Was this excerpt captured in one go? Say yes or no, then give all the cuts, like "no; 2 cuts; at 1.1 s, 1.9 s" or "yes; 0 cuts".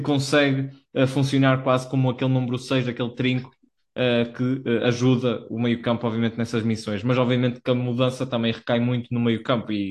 yes; 0 cuts